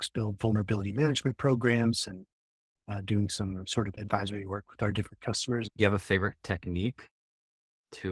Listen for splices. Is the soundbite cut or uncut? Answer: cut